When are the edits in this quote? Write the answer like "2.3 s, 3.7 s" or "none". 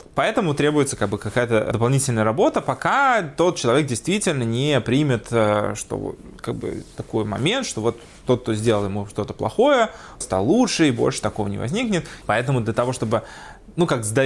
10.2 s, 12.2 s

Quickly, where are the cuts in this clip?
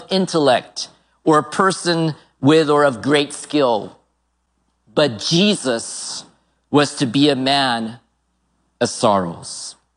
none

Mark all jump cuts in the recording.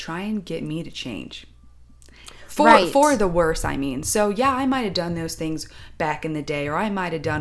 none

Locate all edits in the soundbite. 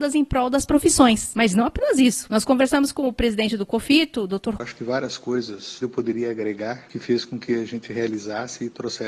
4.6 s, 5.8 s

